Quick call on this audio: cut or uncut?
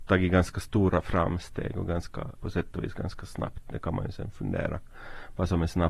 cut